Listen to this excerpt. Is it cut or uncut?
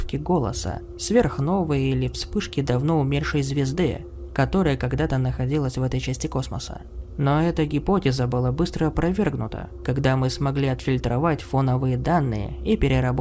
uncut